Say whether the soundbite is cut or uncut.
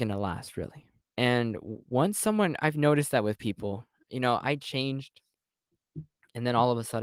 cut